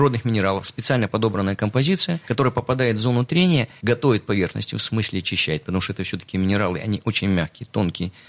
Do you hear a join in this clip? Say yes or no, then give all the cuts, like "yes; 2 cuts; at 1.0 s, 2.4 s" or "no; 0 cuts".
no; 0 cuts